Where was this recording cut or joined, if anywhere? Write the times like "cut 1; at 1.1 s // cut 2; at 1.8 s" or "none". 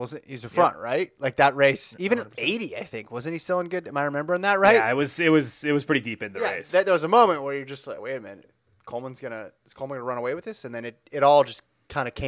none